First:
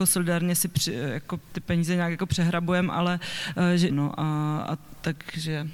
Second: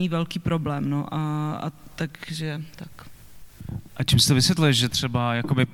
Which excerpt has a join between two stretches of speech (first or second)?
first